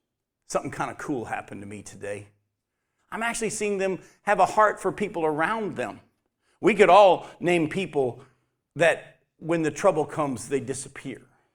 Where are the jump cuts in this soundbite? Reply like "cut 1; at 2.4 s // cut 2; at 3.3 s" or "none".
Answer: cut 1; at 3.0 s